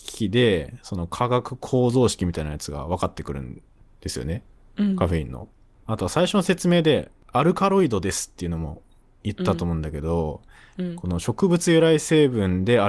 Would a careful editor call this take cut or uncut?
uncut